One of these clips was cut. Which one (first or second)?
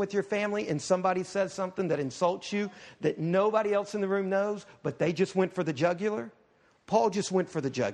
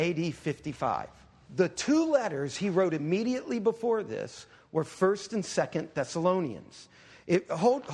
second